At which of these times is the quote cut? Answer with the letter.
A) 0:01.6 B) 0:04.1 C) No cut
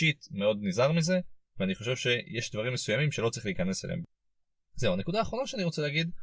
C